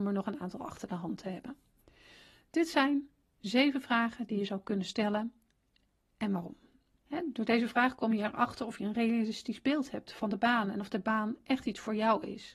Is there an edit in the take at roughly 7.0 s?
yes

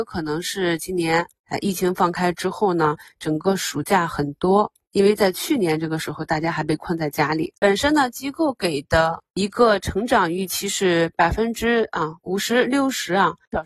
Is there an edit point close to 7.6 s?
yes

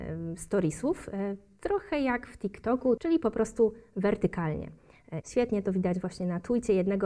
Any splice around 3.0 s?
yes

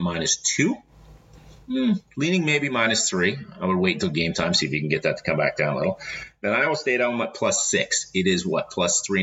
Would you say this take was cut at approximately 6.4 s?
no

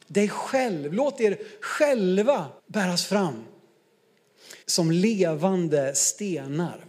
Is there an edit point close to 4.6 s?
yes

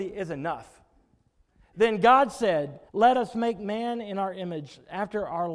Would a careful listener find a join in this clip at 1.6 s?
no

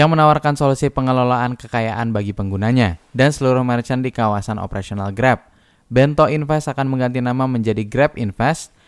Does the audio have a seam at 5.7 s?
no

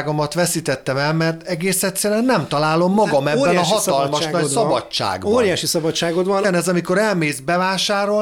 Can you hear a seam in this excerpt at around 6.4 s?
yes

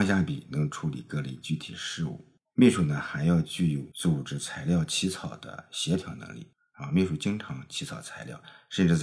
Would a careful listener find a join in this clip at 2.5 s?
yes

